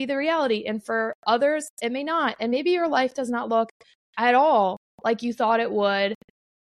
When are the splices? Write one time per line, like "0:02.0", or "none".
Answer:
none